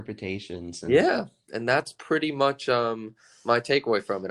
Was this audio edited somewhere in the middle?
no; 0 cuts

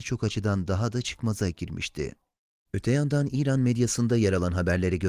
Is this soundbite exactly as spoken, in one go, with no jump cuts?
no; 1 cut; at 2.7 s

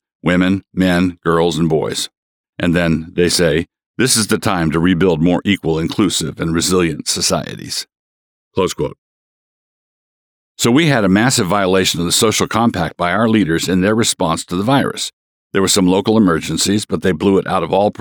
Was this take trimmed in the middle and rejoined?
no; 0 cuts

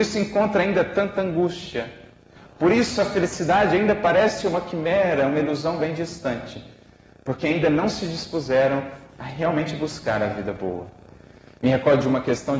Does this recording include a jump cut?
no; 0 cuts

